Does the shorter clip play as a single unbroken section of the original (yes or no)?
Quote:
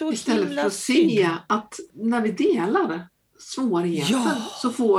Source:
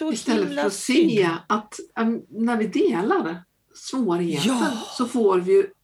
no